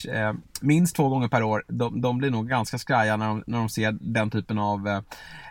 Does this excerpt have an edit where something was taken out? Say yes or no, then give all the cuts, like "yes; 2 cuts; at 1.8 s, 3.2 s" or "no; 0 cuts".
no; 0 cuts